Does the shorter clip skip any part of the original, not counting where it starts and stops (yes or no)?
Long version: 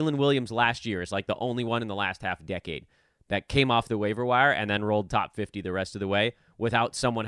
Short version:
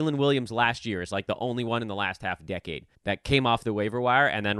yes